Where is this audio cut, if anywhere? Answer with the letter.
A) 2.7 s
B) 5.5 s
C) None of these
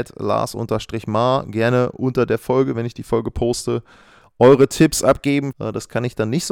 B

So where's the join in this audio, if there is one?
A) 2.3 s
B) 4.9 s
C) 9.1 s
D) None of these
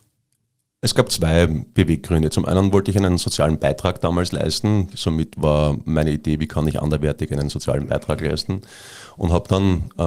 B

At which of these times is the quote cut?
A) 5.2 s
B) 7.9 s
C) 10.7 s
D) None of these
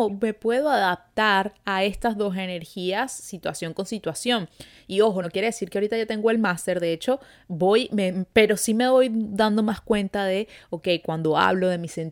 D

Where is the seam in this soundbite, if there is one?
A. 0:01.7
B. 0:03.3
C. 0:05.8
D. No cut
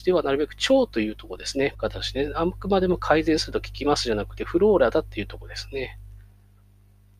A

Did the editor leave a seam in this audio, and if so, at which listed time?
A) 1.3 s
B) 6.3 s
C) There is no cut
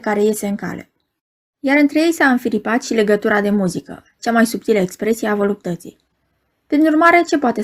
C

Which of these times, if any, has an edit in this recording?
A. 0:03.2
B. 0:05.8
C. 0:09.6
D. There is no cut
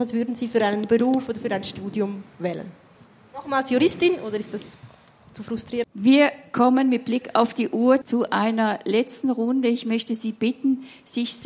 B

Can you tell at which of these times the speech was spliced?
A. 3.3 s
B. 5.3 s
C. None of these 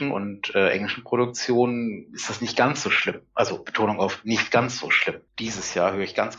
B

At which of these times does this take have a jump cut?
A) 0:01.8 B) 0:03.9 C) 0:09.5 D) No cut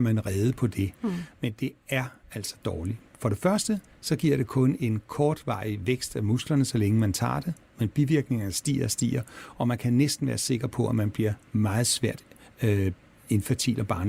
D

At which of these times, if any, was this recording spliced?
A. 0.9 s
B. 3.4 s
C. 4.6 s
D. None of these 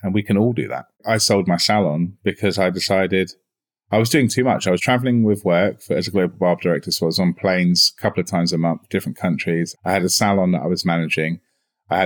A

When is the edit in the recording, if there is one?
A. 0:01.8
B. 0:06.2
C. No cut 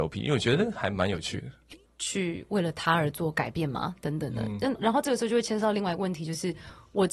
A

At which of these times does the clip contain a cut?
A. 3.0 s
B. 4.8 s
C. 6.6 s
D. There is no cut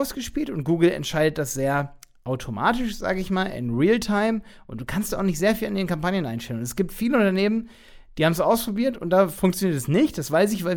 D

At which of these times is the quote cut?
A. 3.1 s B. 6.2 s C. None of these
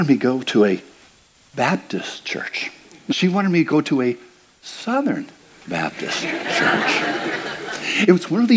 A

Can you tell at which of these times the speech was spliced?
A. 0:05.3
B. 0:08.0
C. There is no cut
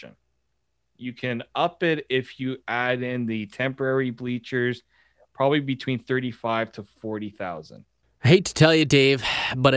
B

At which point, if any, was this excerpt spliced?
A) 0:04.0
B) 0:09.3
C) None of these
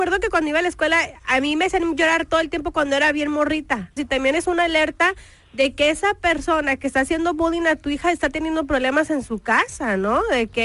A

